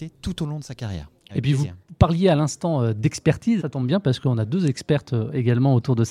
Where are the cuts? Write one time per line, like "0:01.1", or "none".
0:01.3
0:03.6